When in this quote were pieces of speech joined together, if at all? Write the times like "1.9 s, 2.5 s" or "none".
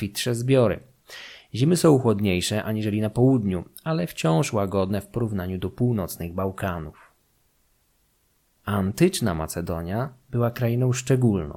8.6 s